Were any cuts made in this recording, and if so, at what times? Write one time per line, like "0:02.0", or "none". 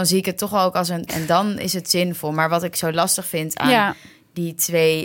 0:01.1